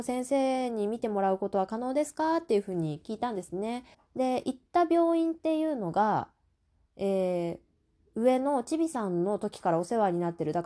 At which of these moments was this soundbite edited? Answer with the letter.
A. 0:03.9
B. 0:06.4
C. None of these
A